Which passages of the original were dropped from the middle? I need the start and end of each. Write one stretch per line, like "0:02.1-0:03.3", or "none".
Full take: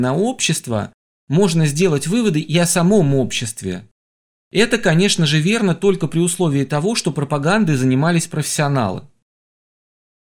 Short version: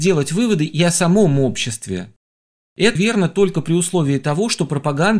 0:04.7-0:05.4